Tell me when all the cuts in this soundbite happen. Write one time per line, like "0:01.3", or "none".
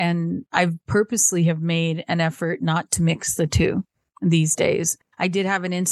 none